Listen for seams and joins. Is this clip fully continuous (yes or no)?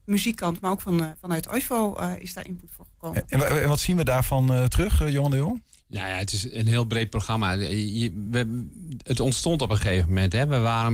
yes